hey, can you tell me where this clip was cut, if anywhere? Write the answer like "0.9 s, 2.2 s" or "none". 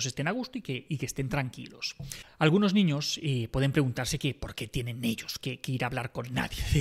none